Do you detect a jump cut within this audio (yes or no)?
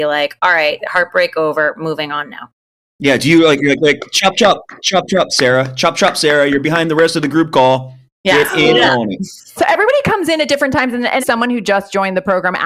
yes